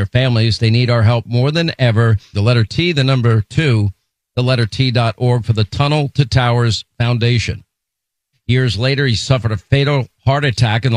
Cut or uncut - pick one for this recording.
cut